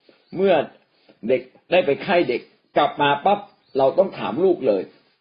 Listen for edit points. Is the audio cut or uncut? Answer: uncut